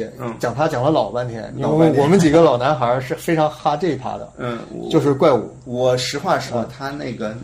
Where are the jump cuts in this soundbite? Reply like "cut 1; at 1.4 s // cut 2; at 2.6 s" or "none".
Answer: none

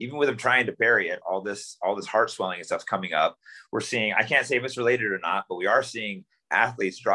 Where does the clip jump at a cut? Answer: none

